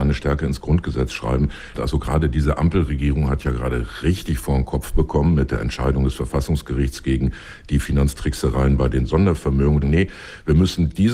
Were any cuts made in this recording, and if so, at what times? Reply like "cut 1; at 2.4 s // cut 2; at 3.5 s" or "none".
cut 1; at 1.7 s // cut 2; at 9.8 s